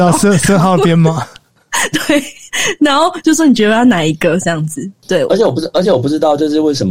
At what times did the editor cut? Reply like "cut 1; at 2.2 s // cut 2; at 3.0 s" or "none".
none